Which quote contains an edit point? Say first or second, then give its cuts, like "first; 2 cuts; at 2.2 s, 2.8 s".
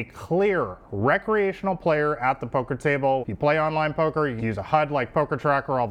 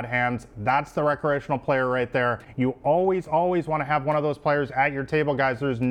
first; 2 cuts; at 3.2 s, 4.4 s